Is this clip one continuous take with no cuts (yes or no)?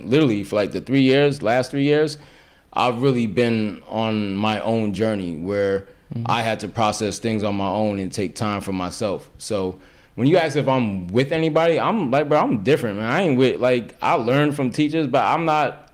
yes